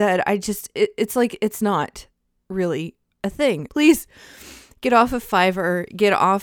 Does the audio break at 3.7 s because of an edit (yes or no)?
yes